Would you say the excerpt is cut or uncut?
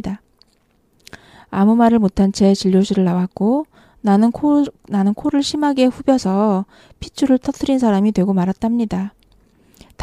uncut